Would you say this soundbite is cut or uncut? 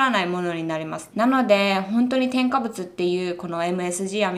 cut